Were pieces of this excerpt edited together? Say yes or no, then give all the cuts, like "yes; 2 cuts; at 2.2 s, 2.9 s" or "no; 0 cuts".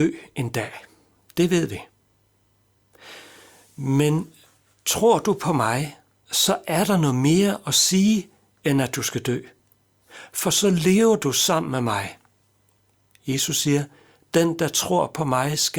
no; 0 cuts